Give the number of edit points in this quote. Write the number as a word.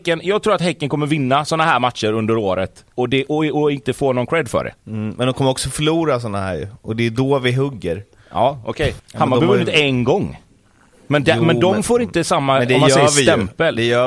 three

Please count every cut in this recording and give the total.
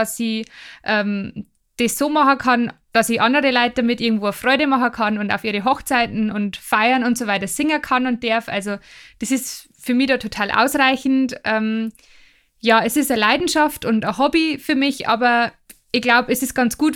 zero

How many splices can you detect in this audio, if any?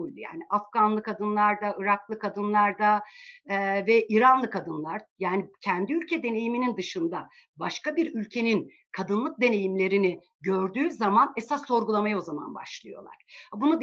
zero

